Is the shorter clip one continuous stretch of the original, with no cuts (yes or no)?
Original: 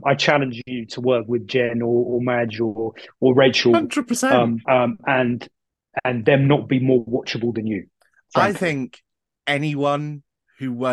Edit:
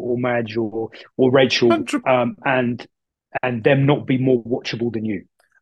no